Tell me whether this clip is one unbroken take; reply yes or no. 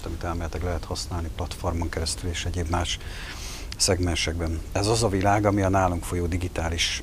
yes